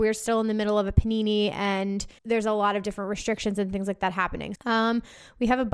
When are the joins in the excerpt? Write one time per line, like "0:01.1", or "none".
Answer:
0:02.2
0:04.5

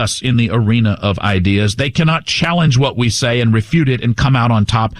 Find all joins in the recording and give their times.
none

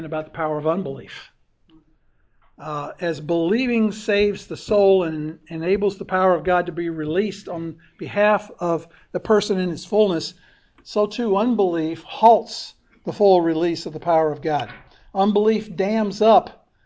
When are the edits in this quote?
none

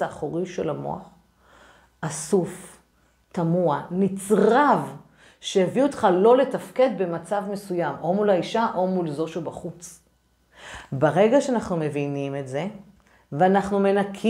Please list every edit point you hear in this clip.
none

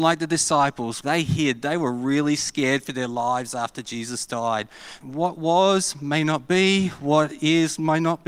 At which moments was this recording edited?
0:01.0
0:05.0

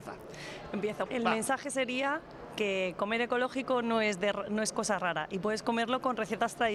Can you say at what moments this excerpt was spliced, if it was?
0:01.1

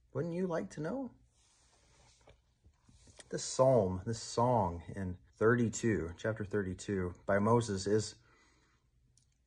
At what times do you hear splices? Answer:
0:03.2
0:05.3

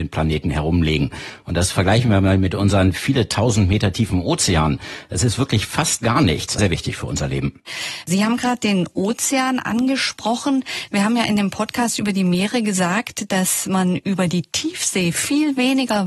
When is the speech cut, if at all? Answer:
0:06.6

